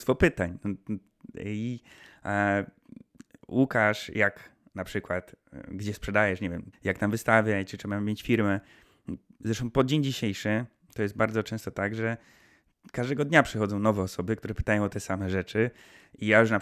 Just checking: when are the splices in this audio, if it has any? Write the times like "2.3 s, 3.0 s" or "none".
6.7 s